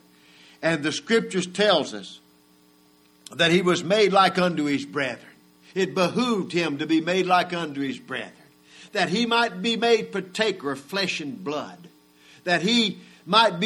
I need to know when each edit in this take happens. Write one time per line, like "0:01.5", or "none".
none